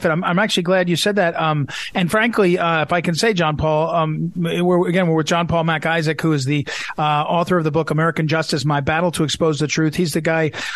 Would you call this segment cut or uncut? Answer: uncut